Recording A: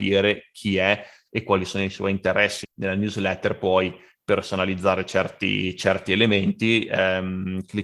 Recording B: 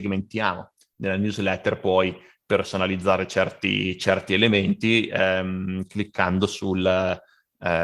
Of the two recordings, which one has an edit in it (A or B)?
A